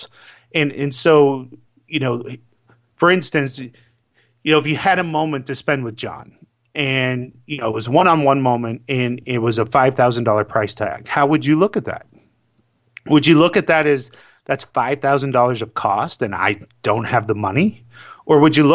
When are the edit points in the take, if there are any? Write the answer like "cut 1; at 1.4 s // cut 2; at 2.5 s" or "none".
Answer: none